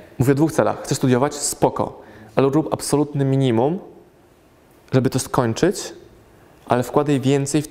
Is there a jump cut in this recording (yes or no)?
no